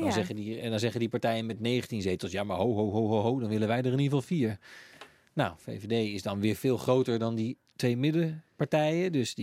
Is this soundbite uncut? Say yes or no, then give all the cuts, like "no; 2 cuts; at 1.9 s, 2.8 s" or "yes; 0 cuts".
yes; 0 cuts